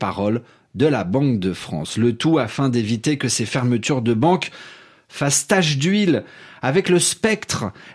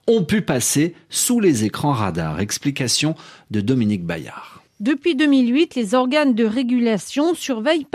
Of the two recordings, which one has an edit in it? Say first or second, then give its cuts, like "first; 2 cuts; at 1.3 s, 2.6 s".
second; 1 cut; at 4.7 s